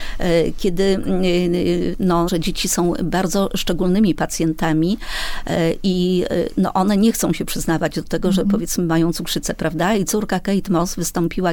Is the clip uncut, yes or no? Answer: no